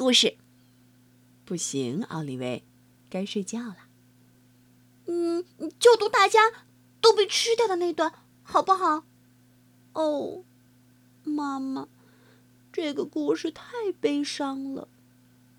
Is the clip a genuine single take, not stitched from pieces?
no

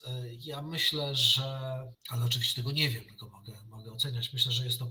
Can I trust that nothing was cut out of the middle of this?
yes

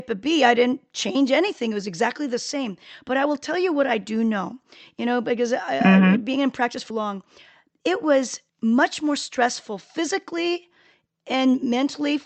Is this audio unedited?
no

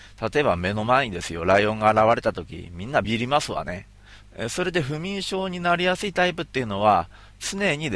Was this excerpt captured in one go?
no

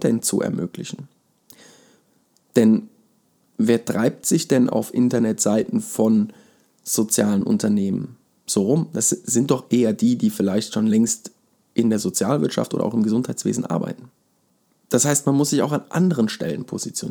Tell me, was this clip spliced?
no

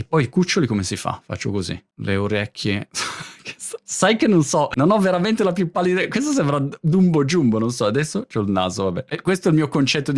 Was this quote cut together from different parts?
no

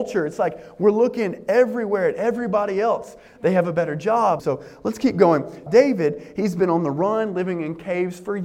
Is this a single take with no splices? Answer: no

